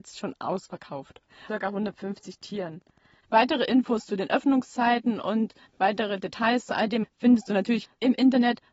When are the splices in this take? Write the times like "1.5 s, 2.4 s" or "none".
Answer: 1.5 s, 3.2 s, 7.0 s